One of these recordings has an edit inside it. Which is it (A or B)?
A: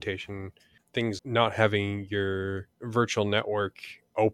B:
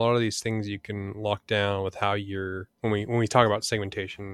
A